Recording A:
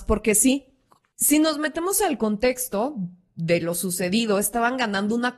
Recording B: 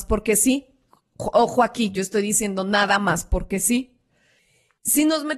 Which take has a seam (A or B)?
A